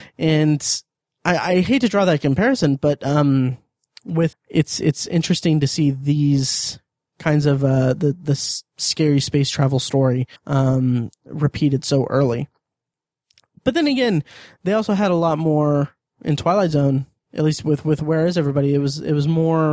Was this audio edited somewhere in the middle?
yes; 2 cuts; at 4.3 s, 10.4 s

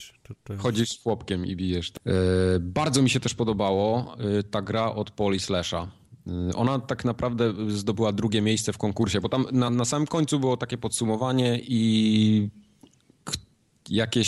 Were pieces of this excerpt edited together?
yes; 2 cuts; at 2.0 s, 9.7 s

